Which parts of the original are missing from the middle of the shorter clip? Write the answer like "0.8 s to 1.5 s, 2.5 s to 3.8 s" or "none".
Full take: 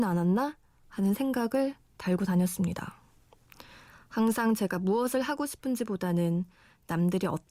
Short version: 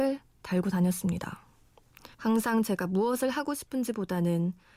3.7 s to 4.0 s